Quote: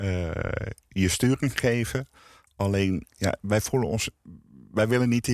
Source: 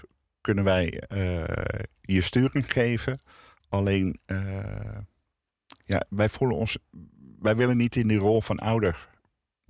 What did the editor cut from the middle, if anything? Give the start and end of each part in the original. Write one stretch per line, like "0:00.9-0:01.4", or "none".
0:04.2-0:05.8